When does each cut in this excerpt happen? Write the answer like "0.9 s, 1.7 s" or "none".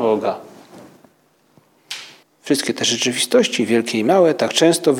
2.2 s